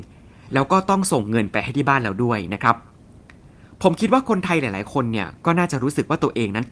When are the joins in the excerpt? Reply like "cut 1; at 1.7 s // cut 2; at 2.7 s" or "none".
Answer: none